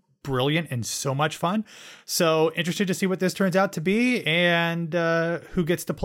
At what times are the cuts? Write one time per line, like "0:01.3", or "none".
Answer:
none

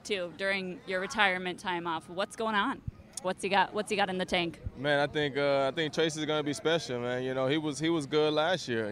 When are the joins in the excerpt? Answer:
0:03.2

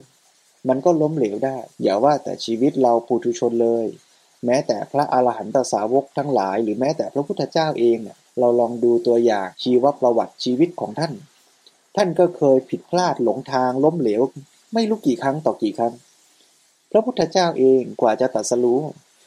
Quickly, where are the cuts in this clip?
0:01.7
0:08.3
0:09.5

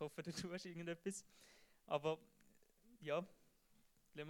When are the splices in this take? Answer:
none

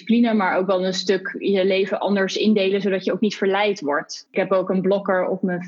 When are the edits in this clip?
0:04.3

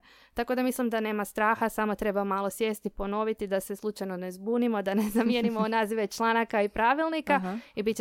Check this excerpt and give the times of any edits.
none

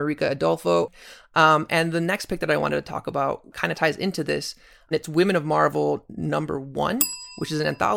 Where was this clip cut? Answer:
0:01.2

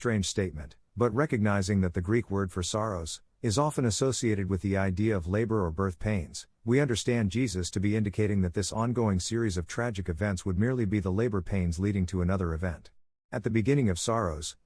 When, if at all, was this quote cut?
0:03.3
0:13.1

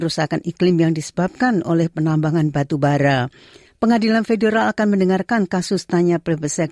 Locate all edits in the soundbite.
none

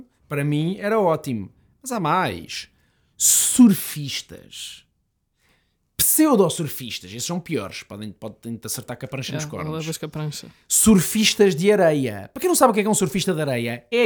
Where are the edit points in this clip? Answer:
none

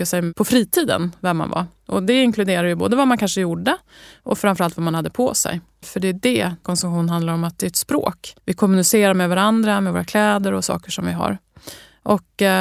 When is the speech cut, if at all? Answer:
0:05.8
0:08.4

